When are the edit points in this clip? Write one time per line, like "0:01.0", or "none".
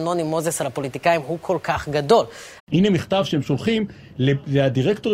0:02.6